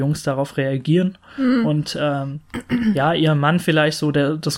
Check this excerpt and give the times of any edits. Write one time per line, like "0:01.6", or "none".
none

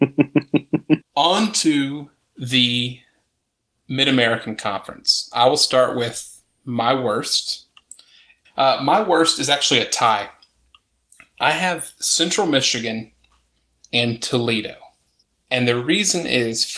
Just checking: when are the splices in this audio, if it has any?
0:01.0
0:08.4

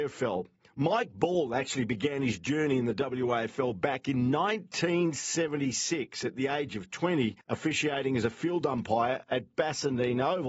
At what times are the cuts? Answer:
0:07.4

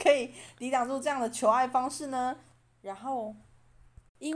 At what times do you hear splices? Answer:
0:02.6

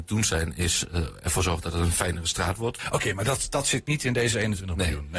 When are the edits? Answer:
0:02.8

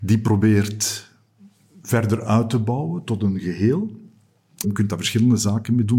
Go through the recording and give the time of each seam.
0:04.6

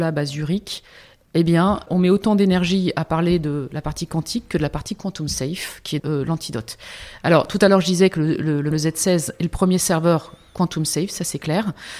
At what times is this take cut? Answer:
0:06.0
0:08.7

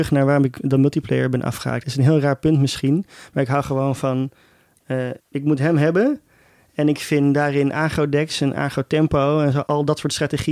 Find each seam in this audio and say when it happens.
none

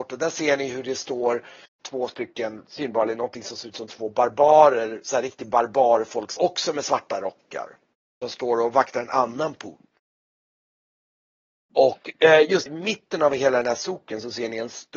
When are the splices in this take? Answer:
0:06.4
0:12.7

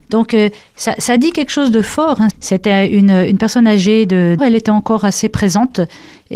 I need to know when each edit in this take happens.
0:02.3
0:04.4

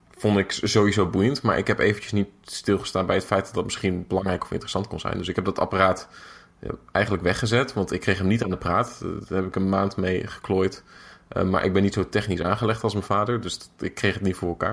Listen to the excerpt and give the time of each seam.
none

